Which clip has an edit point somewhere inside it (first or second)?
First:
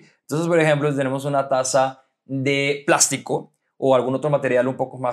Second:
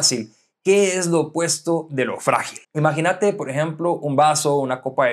second